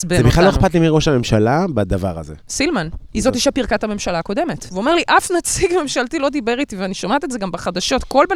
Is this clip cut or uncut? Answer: cut